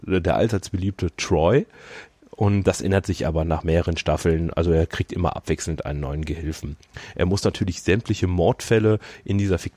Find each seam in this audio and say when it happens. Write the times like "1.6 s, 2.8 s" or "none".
2.6 s

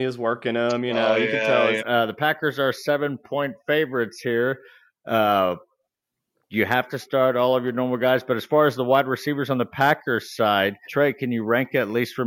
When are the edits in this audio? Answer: 1.8 s, 10.9 s

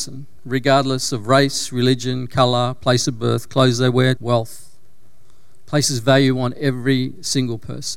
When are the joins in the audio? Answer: 4.2 s

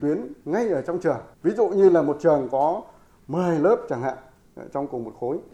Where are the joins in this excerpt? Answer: 1.3 s

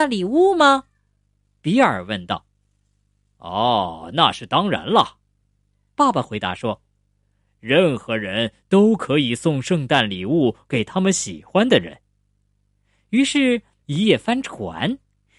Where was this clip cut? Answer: 13.8 s

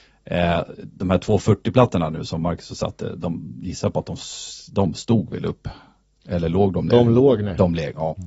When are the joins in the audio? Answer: none

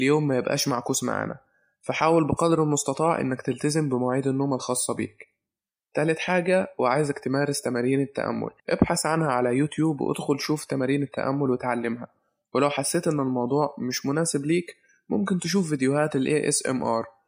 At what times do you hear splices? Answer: 8.6 s

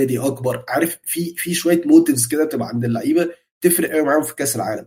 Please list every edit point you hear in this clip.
none

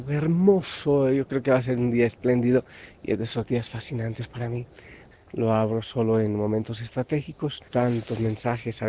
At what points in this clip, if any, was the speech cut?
5.1 s, 7.7 s

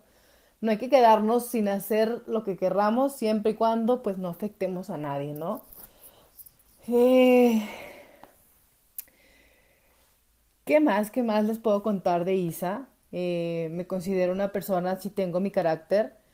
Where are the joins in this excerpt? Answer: none

